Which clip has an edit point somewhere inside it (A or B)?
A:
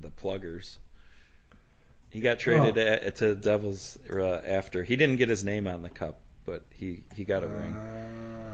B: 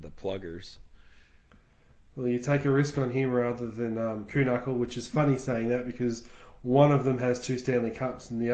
A